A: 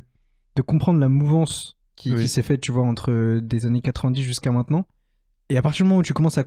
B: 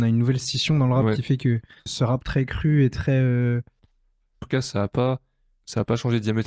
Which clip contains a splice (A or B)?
B